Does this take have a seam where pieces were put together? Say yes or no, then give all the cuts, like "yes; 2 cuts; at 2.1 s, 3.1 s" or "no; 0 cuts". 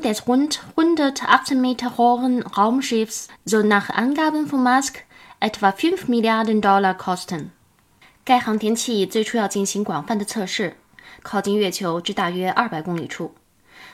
yes; 1 cut; at 11.2 s